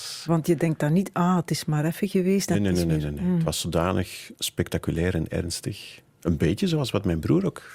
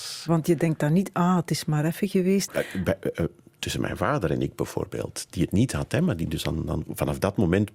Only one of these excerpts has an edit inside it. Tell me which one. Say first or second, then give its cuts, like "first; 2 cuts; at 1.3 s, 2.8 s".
second; 1 cut; at 2.5 s